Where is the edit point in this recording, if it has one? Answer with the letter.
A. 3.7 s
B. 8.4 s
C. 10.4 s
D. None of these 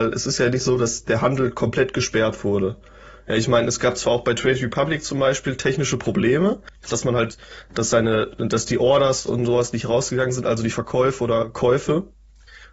D